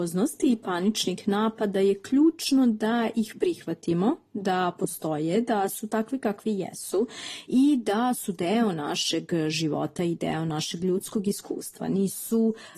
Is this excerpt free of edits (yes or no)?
yes